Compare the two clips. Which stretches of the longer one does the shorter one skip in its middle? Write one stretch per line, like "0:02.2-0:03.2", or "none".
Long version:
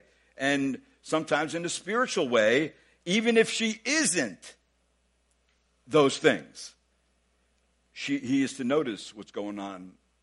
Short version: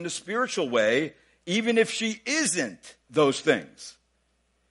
0:04.6-0:05.8

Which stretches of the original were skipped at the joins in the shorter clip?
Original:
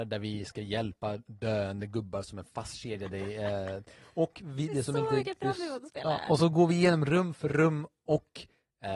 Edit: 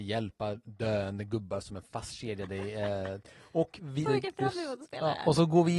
0:04.7-0:05.1

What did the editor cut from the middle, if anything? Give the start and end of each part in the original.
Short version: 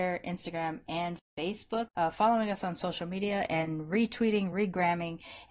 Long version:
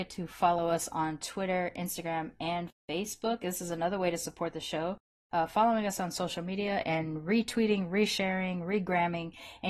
0:03.4-0:05.2
0:07.9-0:08.7

